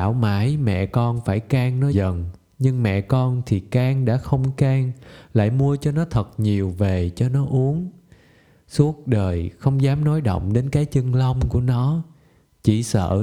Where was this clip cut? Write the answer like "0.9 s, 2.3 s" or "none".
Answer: 1.9 s